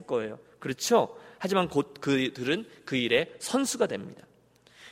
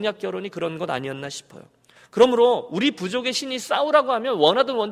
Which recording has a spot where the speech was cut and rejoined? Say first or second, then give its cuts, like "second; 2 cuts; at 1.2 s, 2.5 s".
second; 1 cut; at 2.0 s